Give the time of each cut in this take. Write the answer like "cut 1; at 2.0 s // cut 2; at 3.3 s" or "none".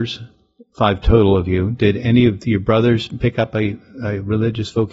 none